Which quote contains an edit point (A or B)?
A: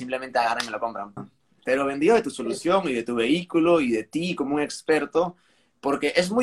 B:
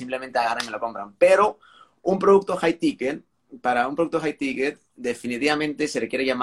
A